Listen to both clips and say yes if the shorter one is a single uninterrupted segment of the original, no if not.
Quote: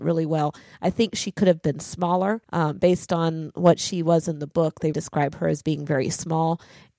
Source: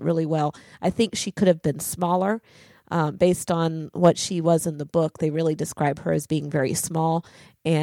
no